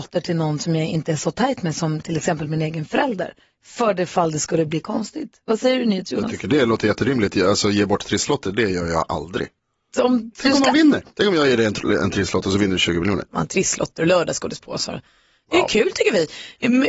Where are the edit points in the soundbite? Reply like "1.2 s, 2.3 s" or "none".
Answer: 11.1 s, 13.3 s